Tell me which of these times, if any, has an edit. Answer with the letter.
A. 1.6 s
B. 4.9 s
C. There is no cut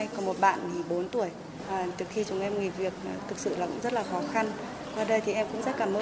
C